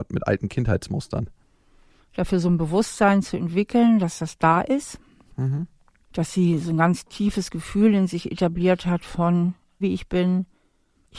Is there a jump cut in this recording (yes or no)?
yes